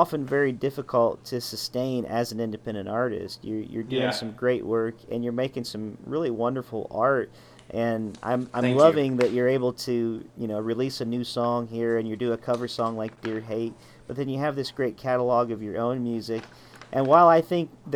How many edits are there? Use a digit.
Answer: 0